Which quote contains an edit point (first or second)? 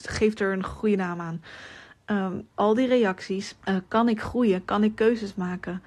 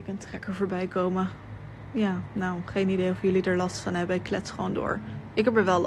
first